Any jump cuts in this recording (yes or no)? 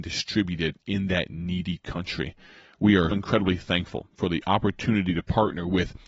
yes